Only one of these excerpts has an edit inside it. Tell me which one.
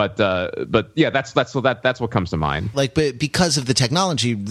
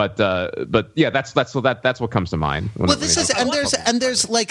first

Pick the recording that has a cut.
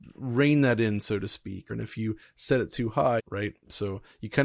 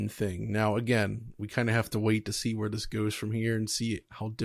first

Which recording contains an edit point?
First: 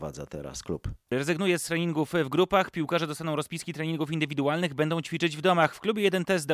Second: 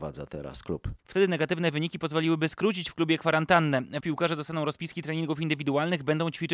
second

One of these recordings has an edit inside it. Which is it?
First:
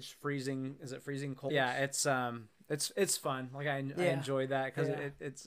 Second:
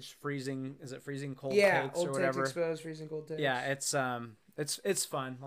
first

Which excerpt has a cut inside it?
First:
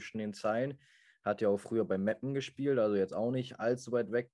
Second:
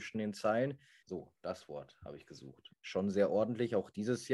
second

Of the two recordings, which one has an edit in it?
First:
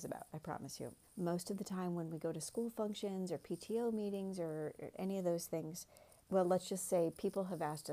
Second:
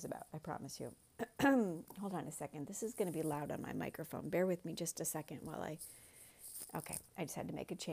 first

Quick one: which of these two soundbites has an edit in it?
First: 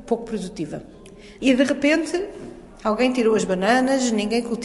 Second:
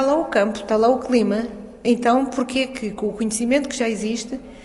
first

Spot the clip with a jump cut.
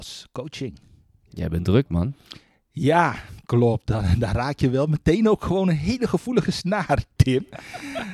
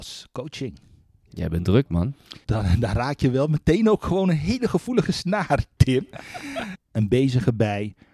second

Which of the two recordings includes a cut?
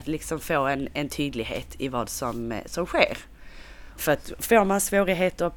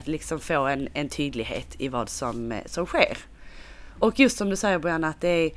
first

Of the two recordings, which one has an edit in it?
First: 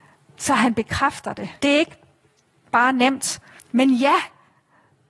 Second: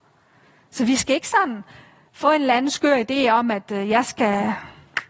first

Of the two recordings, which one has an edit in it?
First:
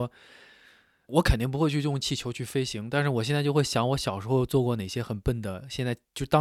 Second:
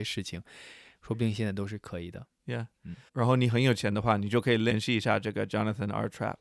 second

